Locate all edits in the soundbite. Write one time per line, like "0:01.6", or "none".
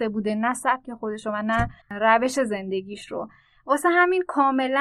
0:01.8